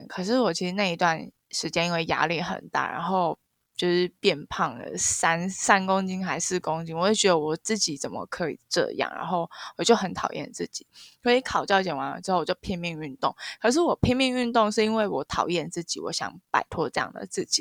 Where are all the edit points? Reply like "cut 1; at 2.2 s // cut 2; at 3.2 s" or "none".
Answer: none